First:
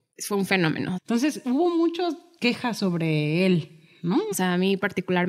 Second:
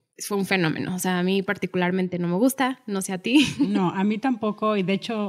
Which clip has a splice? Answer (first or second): first